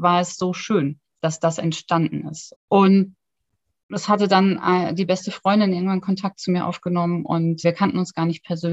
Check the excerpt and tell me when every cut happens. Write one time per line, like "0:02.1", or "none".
0:02.5
0:07.6